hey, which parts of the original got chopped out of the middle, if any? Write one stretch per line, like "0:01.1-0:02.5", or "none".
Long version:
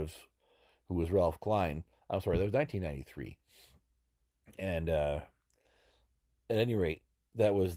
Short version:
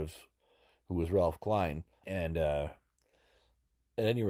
0:02.0-0:04.6